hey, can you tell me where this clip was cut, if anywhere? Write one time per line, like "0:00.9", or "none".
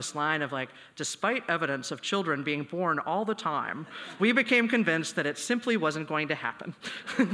0:04.2